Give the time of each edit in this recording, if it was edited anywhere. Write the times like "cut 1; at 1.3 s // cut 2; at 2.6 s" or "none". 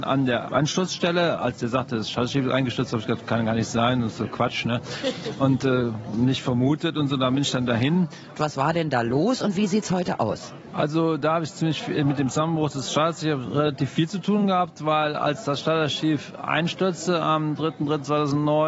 cut 1; at 8.3 s